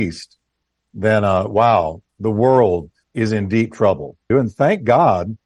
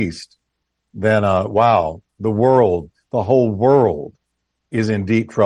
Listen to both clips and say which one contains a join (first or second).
first